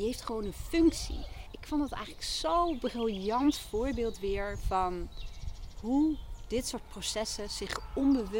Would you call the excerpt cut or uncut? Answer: cut